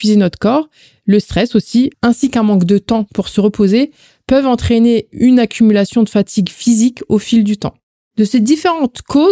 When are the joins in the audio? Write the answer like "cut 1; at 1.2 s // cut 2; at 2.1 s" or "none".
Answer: cut 1; at 1.9 s